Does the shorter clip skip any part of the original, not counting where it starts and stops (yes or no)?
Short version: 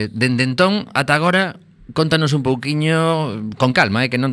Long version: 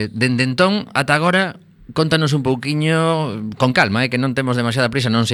no